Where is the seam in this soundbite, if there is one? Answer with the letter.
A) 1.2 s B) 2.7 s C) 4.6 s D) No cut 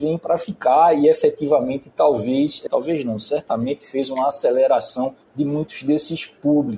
B